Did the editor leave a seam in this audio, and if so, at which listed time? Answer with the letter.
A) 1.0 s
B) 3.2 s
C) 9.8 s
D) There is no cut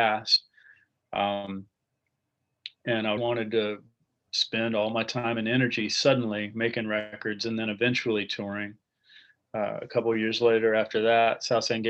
B